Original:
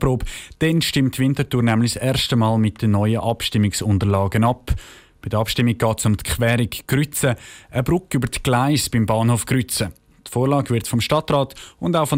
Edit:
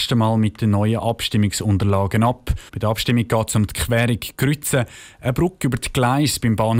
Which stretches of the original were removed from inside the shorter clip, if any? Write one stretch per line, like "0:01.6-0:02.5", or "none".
0:04.9-0:05.2